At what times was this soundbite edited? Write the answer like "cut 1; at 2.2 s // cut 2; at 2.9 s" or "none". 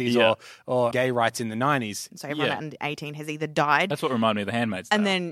cut 1; at 0.9 s // cut 2; at 2.1 s